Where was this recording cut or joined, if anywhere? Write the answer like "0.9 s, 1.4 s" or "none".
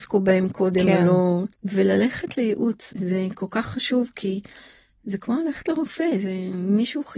1.5 s, 2.9 s